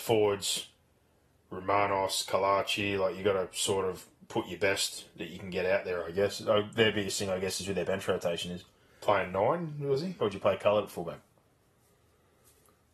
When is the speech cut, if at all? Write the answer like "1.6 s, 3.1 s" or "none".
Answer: 8.9 s, 10.2 s